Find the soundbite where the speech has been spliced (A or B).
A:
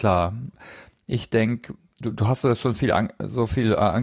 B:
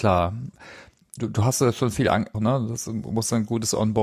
B